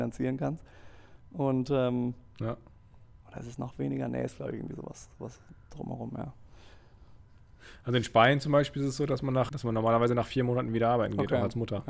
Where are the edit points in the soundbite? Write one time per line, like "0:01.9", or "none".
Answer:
0:09.5